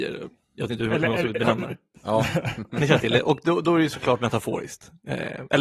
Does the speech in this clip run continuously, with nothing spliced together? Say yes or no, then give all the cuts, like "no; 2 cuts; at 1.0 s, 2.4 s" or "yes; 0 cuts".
no; 1 cut; at 1.9 s